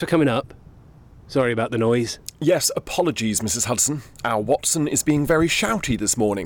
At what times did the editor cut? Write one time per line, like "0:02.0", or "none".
none